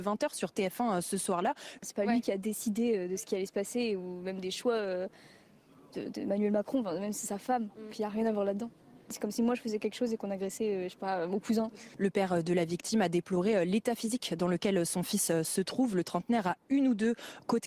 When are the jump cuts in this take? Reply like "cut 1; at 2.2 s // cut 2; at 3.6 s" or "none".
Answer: cut 1; at 1.8 s